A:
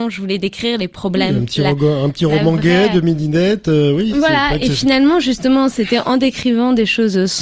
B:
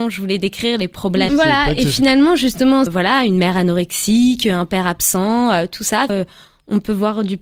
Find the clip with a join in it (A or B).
B